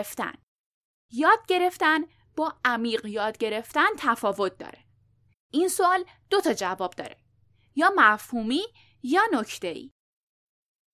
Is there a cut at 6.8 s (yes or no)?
no